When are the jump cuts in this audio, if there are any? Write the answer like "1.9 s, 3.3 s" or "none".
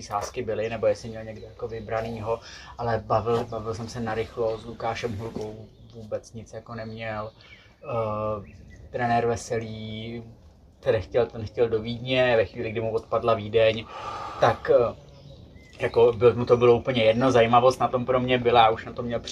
none